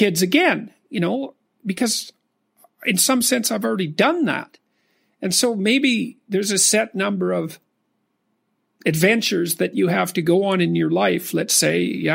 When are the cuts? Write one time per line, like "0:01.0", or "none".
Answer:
none